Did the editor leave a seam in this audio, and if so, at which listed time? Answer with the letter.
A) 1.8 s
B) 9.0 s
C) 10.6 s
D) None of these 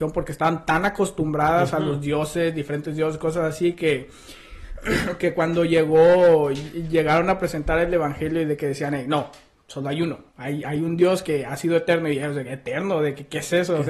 D